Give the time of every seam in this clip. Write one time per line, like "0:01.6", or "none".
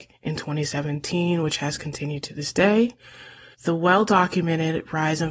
0:03.5